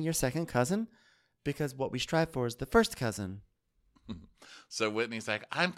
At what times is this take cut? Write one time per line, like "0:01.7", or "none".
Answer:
none